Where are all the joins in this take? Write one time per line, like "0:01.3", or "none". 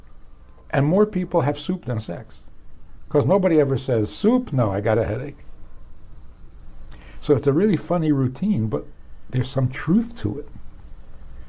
none